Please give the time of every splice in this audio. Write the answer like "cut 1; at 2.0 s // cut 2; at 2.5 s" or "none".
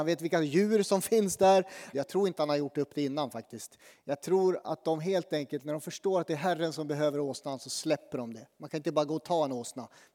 cut 1; at 1.9 s

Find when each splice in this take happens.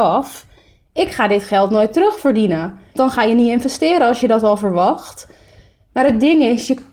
cut 1; at 2.9 s

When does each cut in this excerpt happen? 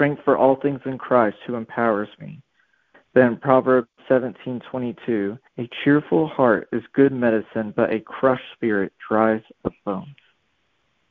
cut 1; at 2.9 s // cut 2; at 5.5 s

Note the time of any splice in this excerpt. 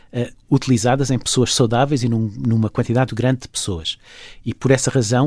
cut 1; at 3.1 s

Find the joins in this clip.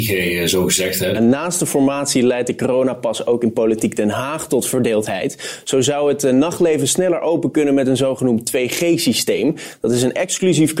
cut 1; at 1.1 s

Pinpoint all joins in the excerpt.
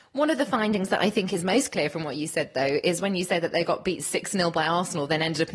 none

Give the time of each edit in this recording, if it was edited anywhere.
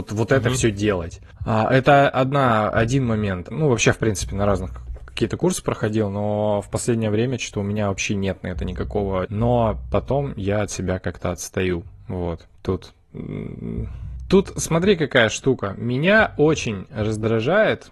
cut 1; at 3.5 s // cut 2; at 9.2 s

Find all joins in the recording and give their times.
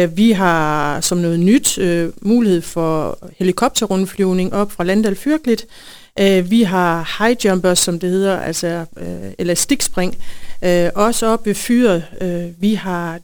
none

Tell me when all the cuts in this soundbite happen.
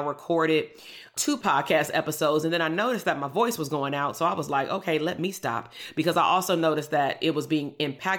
none

